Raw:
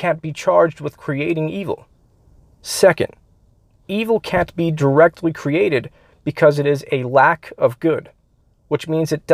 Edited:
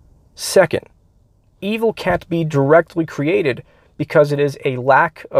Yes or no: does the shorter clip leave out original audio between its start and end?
no